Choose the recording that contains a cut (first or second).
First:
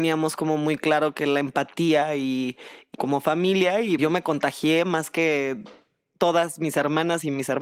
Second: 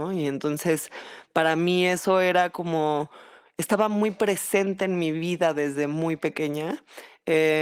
first